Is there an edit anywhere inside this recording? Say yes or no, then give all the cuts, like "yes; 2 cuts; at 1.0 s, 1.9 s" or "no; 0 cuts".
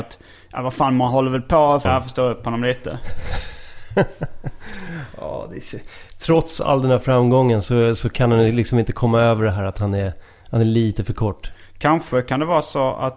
yes; 1 cut; at 1.9 s